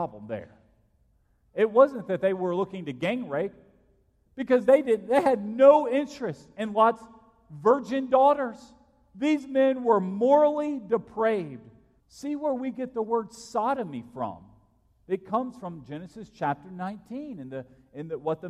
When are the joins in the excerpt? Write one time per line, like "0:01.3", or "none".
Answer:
0:12.0